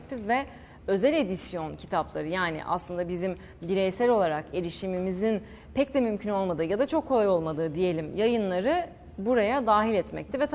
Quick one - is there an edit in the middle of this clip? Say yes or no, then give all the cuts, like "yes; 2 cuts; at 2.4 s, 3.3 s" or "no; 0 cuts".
no; 0 cuts